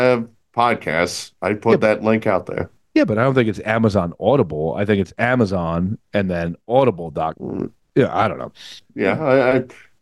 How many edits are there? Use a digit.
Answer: 2